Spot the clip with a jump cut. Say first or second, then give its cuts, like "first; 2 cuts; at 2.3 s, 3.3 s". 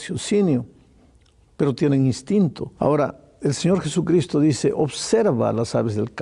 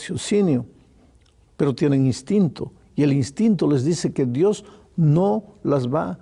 first; 1 cut; at 2.8 s